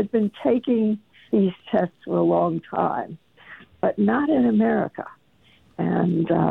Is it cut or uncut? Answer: uncut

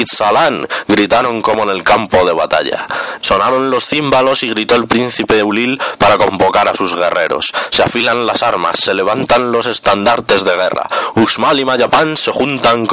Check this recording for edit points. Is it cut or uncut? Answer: cut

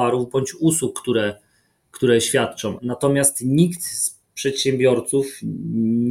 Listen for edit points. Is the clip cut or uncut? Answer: cut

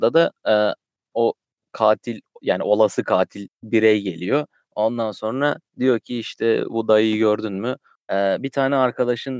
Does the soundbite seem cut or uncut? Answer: cut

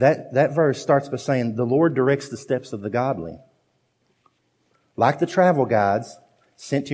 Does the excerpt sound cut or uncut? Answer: uncut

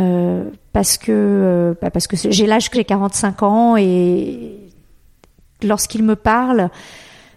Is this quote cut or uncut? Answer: cut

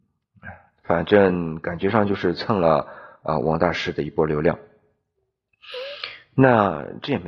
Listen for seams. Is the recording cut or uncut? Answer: uncut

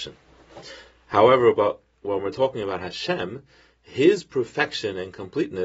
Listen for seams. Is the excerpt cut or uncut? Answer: uncut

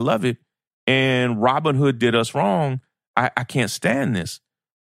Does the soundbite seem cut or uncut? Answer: uncut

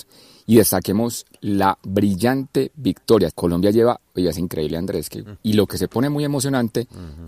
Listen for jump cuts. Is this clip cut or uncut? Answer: cut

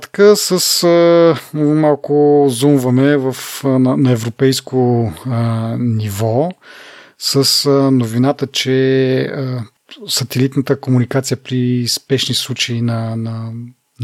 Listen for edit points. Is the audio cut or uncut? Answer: uncut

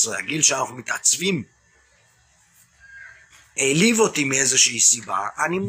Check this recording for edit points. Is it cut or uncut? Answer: uncut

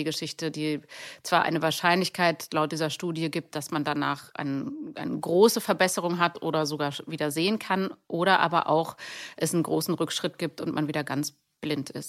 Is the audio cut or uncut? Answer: uncut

